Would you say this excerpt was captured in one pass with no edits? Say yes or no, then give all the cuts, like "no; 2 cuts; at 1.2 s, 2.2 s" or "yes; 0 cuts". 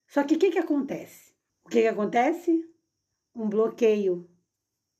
no; 1 cut; at 1.5 s